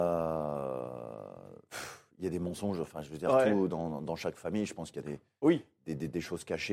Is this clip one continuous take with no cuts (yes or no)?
yes